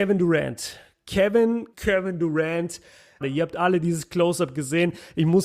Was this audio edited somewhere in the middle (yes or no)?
yes